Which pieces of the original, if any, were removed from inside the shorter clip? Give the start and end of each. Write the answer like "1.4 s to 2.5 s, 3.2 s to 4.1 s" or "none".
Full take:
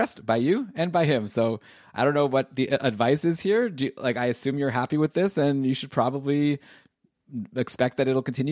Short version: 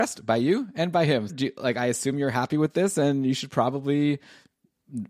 1.3 s to 3.7 s